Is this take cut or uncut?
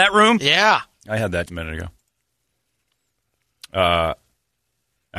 cut